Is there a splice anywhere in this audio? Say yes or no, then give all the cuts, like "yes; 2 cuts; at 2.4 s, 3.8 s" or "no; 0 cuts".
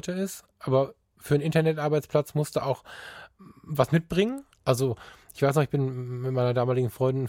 yes; 1 cut; at 4.5 s